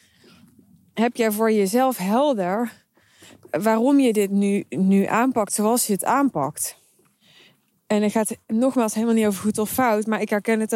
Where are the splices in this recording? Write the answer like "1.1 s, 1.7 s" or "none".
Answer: none